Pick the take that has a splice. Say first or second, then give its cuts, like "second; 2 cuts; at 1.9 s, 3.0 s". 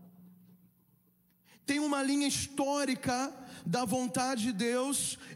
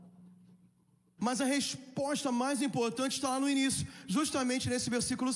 second; 1 cut; at 1.2 s